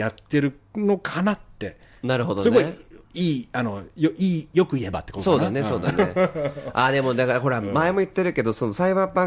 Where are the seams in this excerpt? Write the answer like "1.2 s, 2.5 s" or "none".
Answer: none